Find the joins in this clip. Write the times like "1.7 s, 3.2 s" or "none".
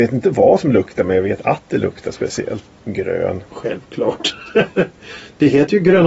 2.7 s